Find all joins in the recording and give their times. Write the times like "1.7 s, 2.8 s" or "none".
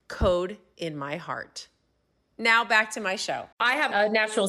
3.5 s